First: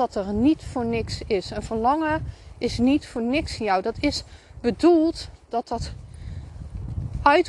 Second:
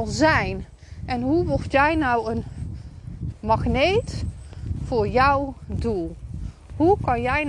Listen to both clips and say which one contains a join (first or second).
second